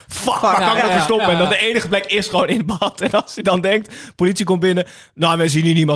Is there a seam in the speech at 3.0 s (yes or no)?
no